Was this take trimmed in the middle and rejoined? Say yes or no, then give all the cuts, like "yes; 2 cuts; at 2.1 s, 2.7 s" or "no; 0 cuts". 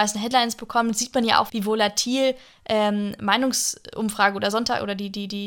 yes; 1 cut; at 1.5 s